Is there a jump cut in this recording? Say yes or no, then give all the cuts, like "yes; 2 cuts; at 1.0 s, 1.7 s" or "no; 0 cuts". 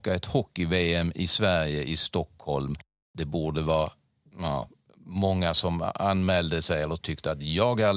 no; 0 cuts